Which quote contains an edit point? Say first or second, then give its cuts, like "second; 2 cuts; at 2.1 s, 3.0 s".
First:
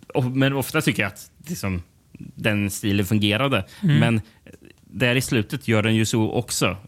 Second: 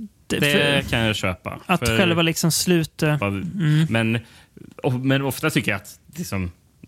second; 1 cut; at 3.2 s